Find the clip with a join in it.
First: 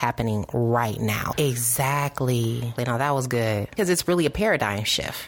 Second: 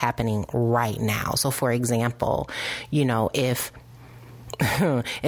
first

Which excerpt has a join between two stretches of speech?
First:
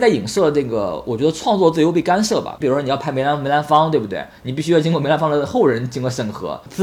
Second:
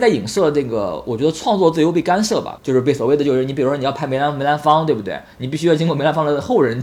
first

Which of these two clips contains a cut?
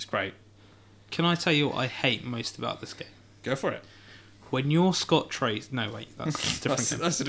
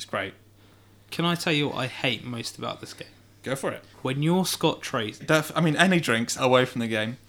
second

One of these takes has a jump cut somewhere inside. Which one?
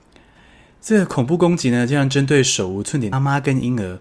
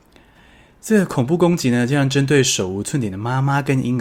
first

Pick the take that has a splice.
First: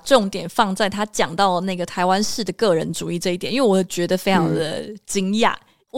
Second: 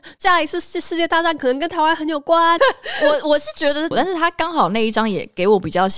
second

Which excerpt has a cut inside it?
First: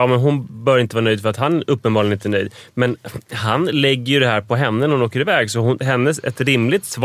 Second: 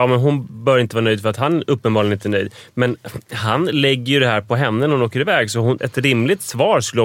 second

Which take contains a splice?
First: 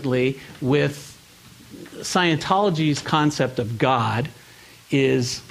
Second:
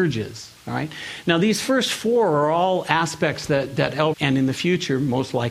second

